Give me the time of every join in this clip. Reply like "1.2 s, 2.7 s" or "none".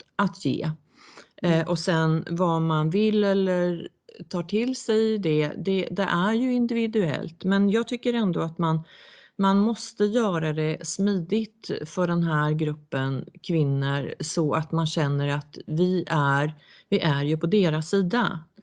none